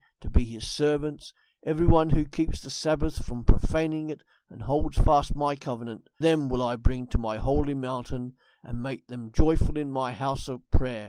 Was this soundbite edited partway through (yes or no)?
yes